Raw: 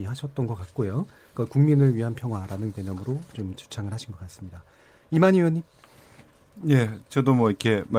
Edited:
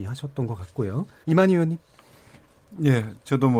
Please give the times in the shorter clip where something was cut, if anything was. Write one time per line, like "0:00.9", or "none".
0:01.2